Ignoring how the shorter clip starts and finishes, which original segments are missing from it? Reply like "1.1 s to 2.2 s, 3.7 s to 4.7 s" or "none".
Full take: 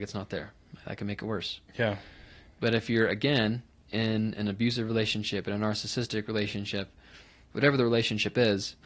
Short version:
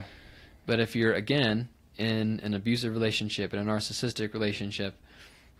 none

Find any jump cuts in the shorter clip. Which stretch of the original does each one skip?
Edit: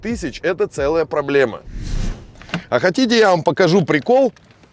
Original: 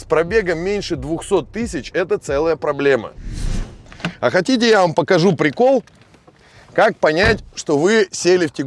none

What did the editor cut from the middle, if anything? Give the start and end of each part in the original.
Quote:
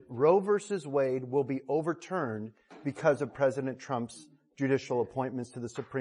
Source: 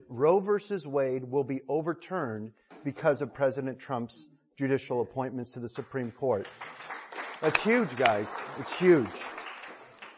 none

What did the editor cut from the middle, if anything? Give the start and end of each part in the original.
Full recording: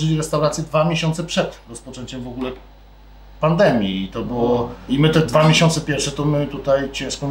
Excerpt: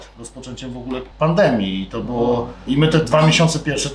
2.6 s to 3.3 s

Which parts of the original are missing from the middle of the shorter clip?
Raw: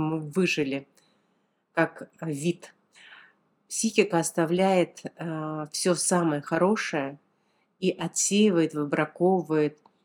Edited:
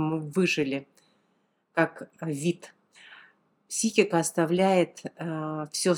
none

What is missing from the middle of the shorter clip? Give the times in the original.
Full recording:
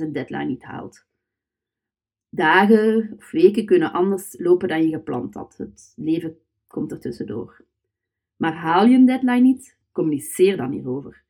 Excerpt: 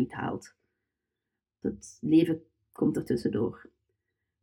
2.1 s to 5.6 s

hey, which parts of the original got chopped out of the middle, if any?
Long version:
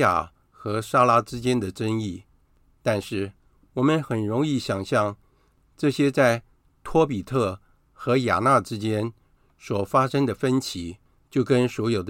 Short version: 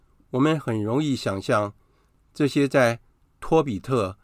none

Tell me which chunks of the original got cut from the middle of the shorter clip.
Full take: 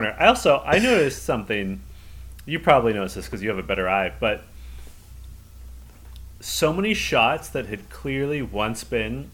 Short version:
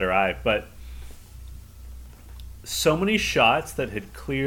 none

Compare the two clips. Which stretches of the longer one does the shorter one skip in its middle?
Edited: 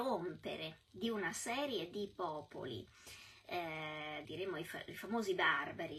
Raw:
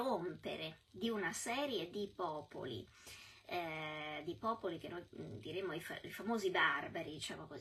4.3 s to 5.4 s

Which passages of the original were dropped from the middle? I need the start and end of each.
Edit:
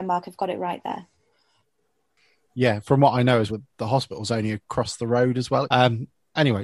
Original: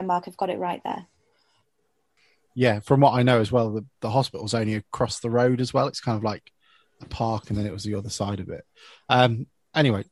3.5 s to 3.7 s, 5.9 s to 9.0 s

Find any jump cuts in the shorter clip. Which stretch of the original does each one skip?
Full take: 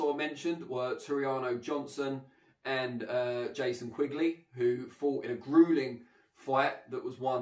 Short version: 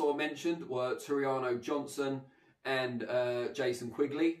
none

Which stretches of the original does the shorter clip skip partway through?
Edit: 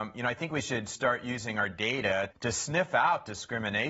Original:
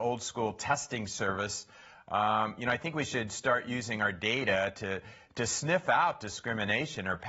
4.7 s to 5.3 s

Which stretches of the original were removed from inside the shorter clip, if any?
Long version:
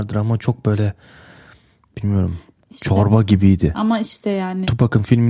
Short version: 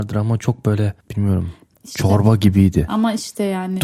1.0 s to 1.9 s

